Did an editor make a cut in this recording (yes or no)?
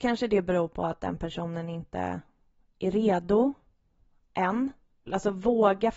yes